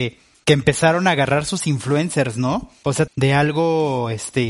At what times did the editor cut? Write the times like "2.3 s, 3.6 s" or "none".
3.1 s